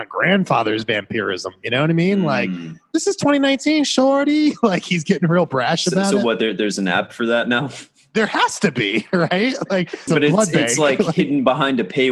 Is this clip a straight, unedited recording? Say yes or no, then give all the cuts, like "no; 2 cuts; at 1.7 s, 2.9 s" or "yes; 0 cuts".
no; 1 cut; at 10.1 s